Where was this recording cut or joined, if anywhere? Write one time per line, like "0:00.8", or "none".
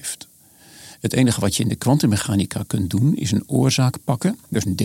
none